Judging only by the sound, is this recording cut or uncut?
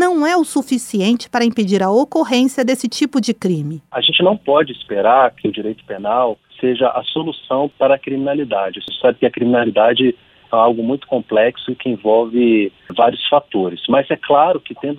uncut